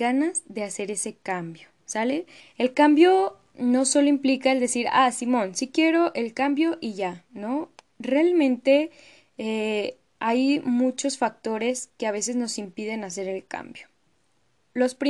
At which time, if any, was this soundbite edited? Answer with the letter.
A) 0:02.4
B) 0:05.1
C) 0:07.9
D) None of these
A